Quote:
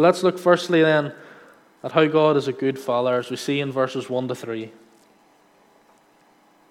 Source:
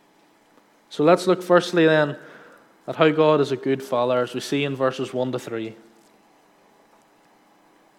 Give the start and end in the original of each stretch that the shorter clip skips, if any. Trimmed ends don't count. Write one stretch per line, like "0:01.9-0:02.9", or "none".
none